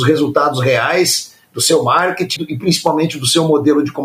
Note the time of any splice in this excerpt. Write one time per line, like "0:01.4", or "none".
0:02.4